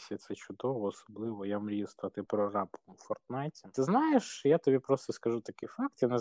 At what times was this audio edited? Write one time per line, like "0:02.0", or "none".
0:03.7

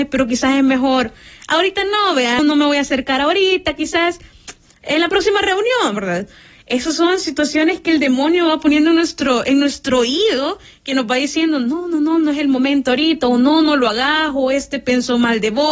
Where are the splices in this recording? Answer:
0:02.4

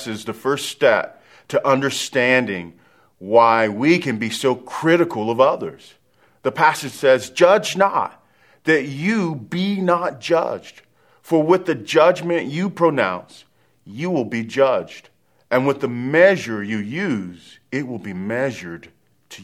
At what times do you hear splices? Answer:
none

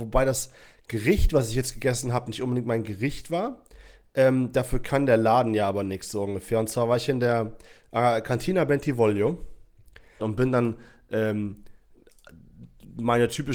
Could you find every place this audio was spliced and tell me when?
0:10.2

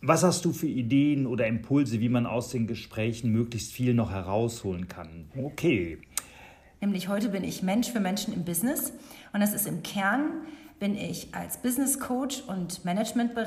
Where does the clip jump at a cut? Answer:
0:05.3
0:06.8

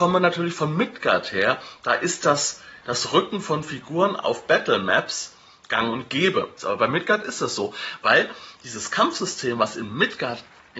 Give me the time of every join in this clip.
0:06.6

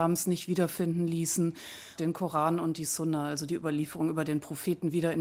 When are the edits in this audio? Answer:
0:02.0

